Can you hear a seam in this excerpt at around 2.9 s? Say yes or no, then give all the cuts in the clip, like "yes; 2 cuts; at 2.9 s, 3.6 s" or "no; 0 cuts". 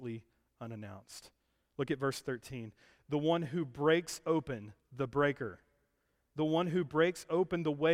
no; 1 cut; at 4.8 s